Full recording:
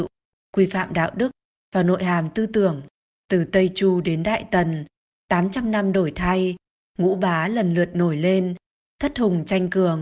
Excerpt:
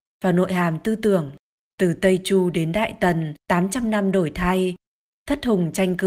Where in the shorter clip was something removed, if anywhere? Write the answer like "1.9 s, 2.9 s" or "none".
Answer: 3.4 s, 5.0 s